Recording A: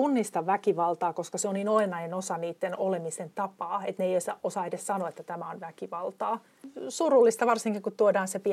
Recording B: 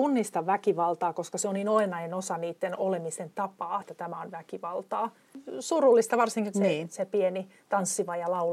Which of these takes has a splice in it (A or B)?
B